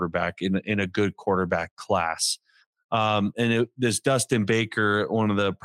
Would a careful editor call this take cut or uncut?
uncut